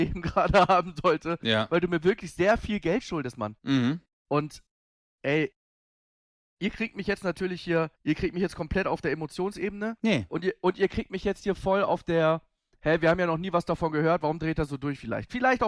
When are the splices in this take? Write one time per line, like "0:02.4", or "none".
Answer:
0:07.9